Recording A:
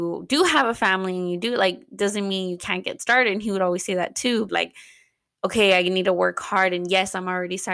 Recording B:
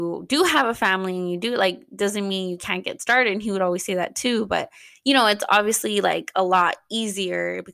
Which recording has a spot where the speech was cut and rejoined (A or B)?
A